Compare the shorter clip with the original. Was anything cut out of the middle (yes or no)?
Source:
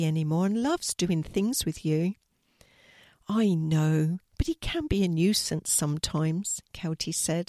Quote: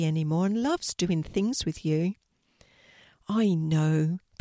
no